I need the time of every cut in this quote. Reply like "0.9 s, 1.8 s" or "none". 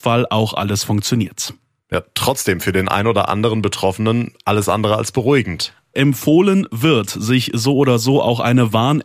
5.9 s